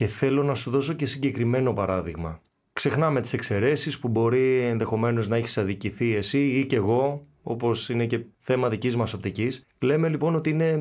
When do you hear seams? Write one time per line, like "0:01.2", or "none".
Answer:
none